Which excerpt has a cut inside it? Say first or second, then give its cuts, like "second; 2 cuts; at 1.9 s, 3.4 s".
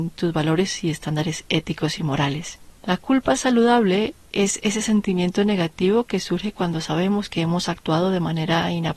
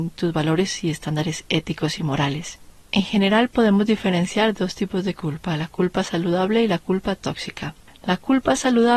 first; 1 cut; at 2.8 s